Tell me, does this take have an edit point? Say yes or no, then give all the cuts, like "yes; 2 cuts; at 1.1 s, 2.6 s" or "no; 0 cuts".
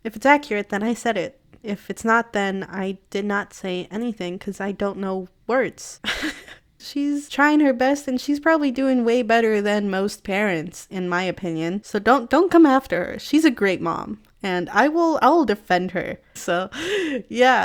yes; 2 cuts; at 6.8 s, 16.4 s